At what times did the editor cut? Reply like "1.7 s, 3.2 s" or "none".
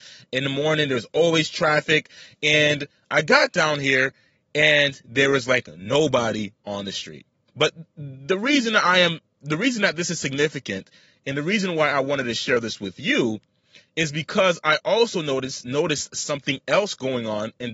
7.5 s